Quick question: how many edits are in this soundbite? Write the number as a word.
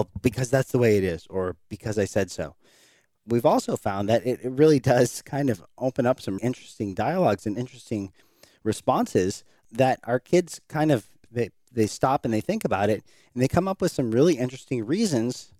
one